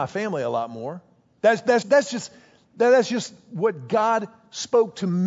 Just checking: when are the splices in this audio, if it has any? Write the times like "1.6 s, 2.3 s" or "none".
1.8 s